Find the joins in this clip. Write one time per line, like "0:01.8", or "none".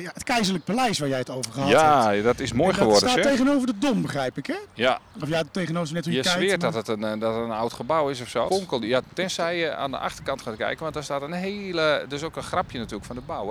0:08.5